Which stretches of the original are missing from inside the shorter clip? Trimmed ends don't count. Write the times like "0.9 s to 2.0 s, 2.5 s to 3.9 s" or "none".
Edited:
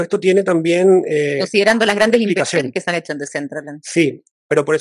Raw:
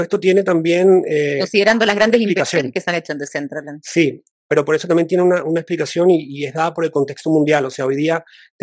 none